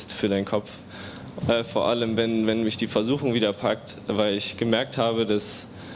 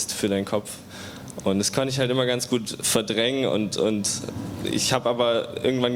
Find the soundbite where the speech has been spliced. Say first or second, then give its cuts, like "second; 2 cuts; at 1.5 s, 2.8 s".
first; 1 cut; at 1.4 s